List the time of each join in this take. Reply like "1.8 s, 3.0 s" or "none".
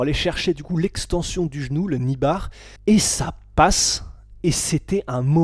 2.8 s